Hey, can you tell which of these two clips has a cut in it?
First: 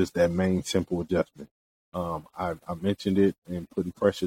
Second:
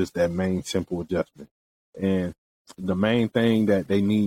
first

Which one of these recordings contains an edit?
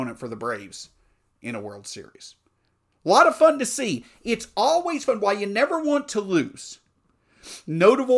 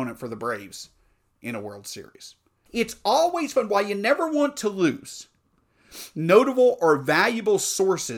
second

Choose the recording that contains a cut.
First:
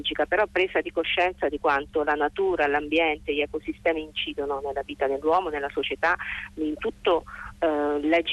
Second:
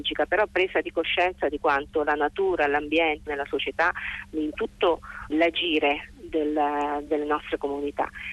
second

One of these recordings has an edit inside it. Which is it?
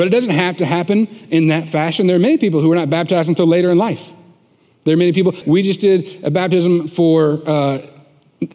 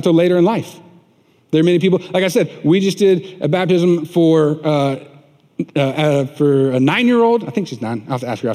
first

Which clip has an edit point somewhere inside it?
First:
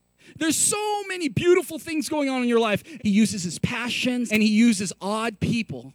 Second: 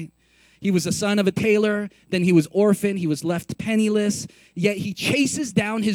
first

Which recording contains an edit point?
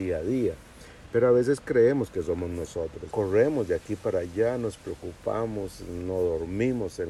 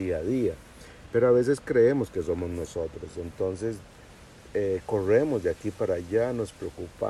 first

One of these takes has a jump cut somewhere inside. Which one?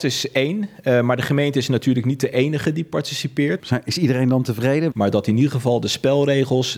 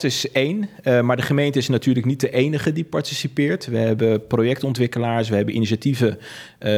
first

